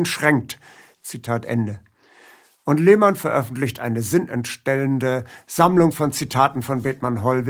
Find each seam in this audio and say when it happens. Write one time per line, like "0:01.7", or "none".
0:00.9